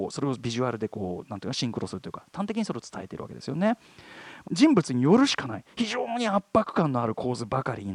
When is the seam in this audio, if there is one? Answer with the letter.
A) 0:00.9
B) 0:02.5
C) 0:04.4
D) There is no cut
C